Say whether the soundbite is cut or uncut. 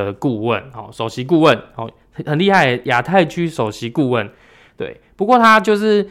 uncut